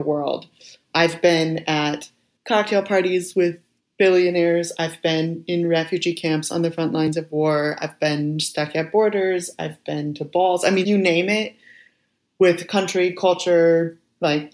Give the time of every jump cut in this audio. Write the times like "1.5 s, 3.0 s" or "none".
10.8 s